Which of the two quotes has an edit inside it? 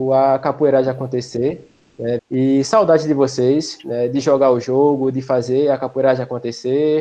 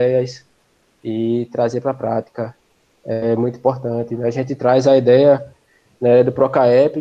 first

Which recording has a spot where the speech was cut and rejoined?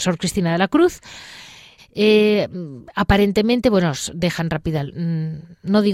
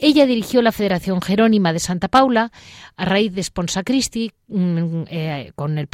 first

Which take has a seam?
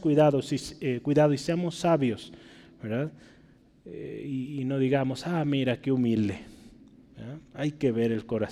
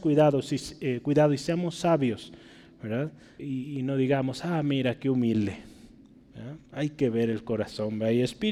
second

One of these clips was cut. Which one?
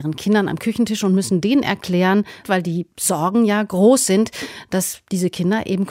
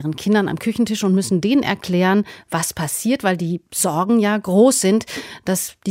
first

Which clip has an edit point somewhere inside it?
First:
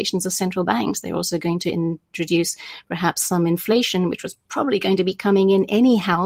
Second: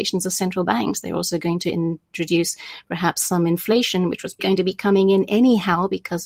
second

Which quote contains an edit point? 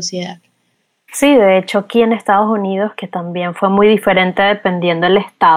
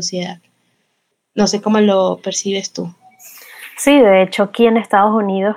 first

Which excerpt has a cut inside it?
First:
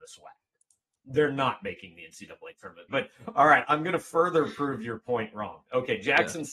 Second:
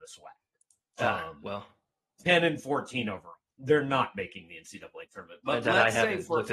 first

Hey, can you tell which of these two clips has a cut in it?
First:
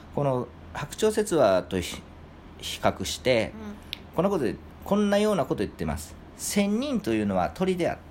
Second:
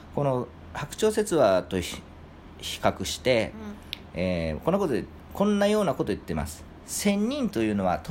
first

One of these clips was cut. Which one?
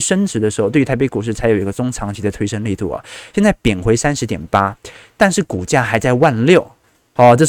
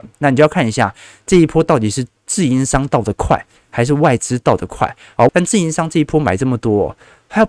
second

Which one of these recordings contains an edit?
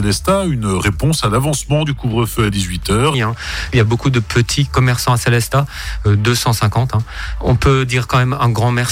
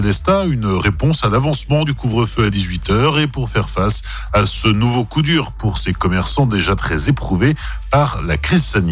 first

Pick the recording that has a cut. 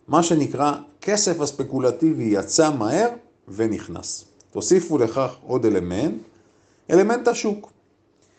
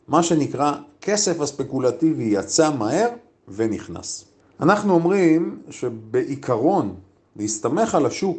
second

